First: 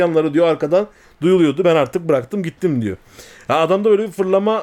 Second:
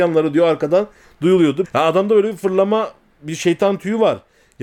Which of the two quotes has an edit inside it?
second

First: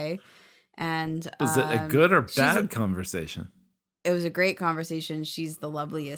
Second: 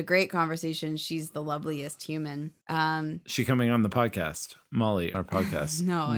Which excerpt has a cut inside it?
second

